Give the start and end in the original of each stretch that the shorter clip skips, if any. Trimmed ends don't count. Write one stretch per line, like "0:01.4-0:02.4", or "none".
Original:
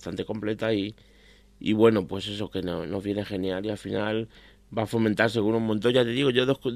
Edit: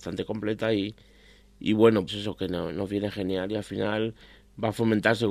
0:02.1-0:02.2